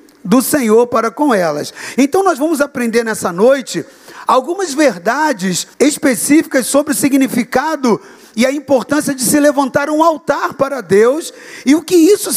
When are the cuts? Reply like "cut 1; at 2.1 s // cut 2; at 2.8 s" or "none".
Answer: cut 1; at 2.0 s // cut 2; at 5.7 s